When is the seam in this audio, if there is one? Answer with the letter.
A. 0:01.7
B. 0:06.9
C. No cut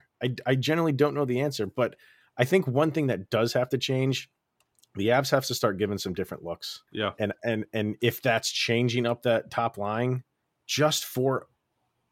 B